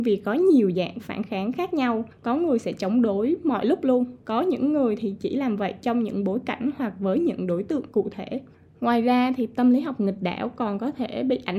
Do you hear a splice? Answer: no; 0 cuts

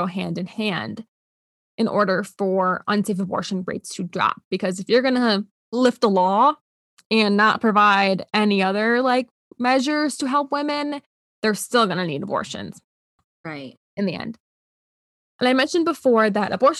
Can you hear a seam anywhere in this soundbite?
no; 0 cuts

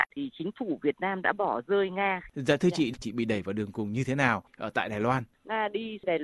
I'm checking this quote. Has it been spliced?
yes; 1 cut; at 2.3 s

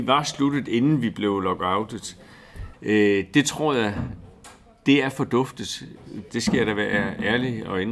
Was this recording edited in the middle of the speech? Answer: yes; 2 cuts; at 2.7 s, 6.3 s

